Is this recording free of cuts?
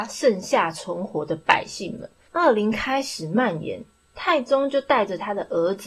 no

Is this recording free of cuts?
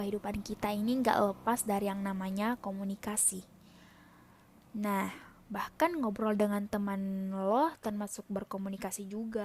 yes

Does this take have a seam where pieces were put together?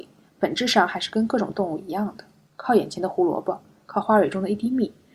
no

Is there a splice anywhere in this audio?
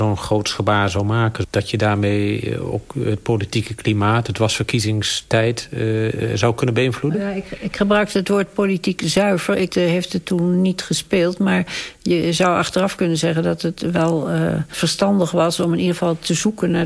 yes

